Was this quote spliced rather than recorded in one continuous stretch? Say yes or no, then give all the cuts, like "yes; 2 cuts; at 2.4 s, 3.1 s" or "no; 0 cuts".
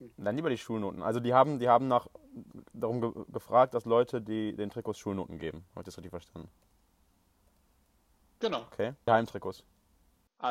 yes; 1 cut; at 9.1 s